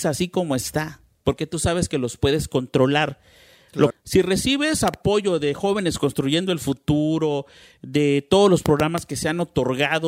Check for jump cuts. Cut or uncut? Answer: cut